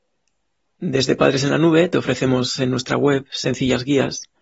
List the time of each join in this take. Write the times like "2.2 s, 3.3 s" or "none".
none